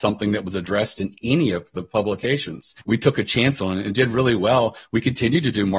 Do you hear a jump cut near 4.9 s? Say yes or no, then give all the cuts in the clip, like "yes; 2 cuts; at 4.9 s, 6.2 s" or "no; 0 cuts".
no; 1 cut; at 2.8 s